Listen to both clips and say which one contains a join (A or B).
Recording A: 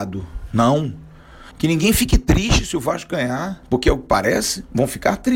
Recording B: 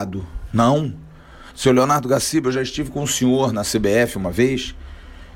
A